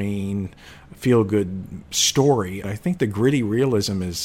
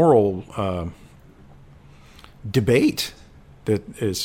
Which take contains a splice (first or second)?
first